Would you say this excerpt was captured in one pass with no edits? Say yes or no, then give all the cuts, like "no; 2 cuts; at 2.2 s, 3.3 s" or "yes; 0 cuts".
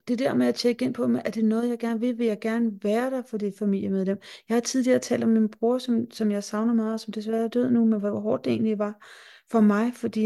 yes; 0 cuts